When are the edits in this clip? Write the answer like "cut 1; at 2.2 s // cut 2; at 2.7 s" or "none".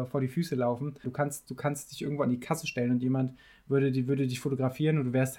cut 1; at 1.0 s